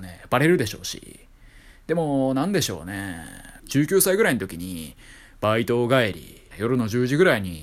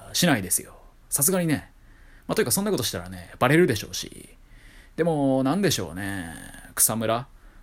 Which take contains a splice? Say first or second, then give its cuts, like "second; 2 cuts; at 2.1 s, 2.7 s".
first; 2 cuts; at 3.6 s, 6.5 s